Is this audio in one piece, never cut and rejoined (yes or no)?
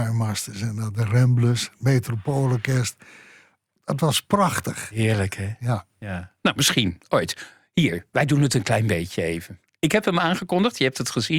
yes